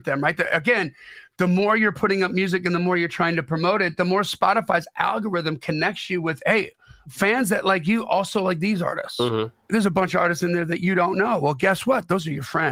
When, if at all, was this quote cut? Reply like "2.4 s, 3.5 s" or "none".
none